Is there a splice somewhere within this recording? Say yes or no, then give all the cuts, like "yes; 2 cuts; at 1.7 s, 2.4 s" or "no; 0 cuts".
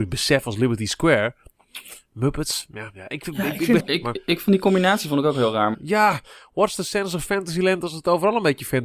yes; 2 cuts; at 3.8 s, 5.7 s